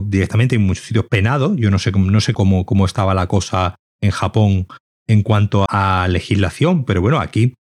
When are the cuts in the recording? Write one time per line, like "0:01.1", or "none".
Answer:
0:02.3
0:05.7